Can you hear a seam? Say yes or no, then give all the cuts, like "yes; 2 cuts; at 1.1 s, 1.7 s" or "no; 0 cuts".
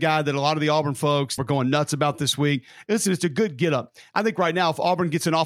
yes; 1 cut; at 1.4 s